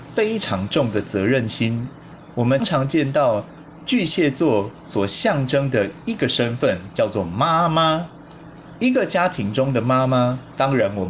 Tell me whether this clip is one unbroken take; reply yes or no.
no